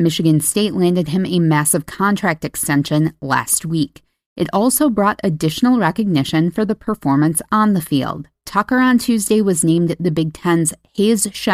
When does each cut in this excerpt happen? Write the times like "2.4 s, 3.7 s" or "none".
none

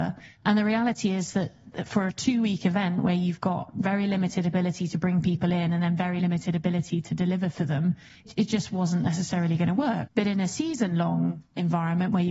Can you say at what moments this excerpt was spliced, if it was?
10.1 s

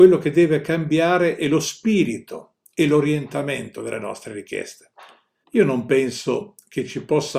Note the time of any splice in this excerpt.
5.4 s

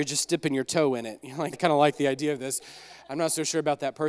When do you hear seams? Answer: 1.5 s

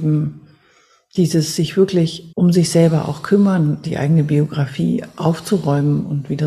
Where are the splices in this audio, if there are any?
2.3 s, 3.8 s

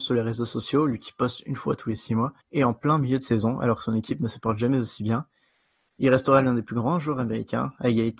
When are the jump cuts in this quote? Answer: 2.4 s

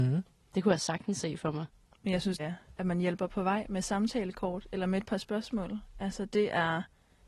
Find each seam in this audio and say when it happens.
2.4 s

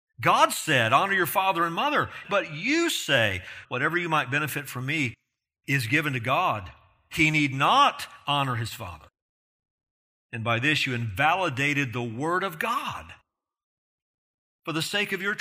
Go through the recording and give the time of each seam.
2.2 s, 3.6 s

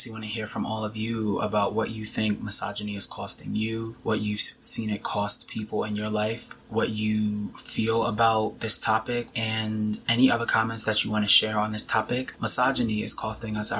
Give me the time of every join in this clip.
9.3 s, 12.3 s

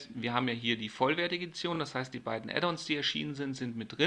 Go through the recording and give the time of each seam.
none

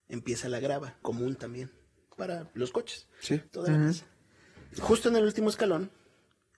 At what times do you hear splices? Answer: 1.0 s, 3.5 s, 4.7 s

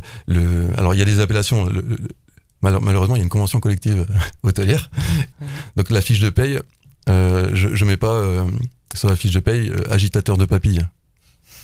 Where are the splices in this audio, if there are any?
5.3 s

